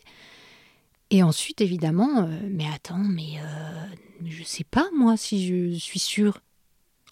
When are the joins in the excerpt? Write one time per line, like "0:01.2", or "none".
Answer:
none